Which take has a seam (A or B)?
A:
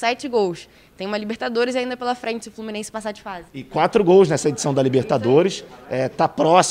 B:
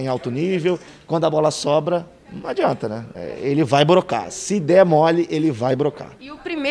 A